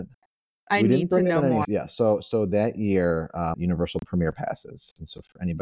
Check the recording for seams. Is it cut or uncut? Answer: cut